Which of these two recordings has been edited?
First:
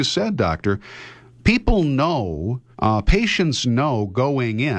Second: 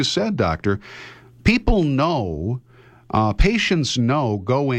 first; 1 cut; at 2.7 s

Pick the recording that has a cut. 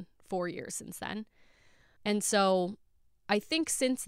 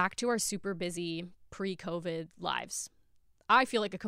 first; 1 cut; at 2.0 s

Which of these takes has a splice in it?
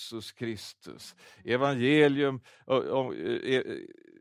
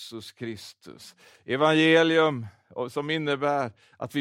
second; 1 cut; at 1.3 s

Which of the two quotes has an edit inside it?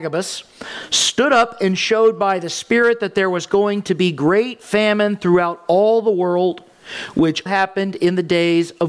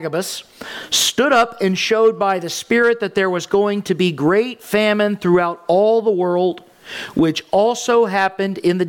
first; 1 cut; at 7.5 s

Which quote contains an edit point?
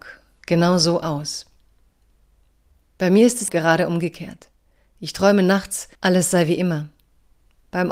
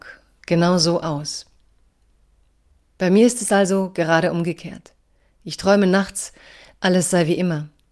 first; 2 cuts; at 3.5 s, 5.9 s

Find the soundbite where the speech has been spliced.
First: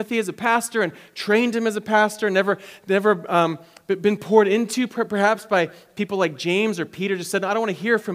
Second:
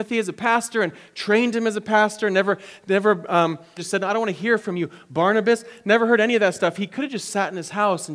second; 1 cut; at 3.8 s

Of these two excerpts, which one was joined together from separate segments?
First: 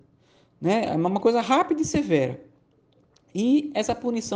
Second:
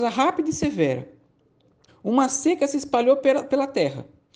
second; 1 cut; at 1.9 s

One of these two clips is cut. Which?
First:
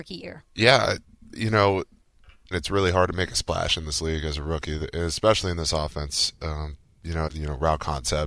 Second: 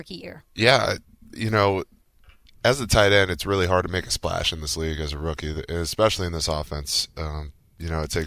first; 2 cuts; at 2.5 s, 7.3 s

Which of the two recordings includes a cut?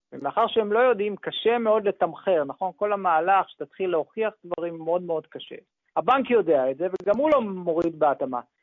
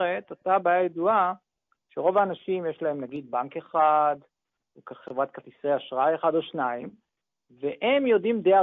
first; 1 cut; at 5.9 s

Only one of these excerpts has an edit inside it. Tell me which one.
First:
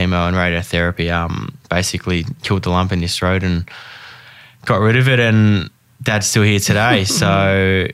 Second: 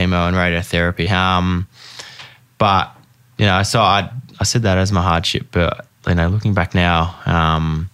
second; 1 cut; at 1.1 s

